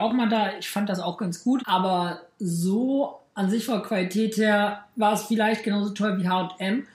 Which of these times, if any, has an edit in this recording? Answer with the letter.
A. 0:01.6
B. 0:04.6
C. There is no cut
A